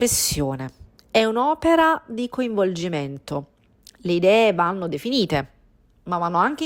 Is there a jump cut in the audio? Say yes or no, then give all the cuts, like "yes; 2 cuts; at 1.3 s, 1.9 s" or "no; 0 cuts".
no; 0 cuts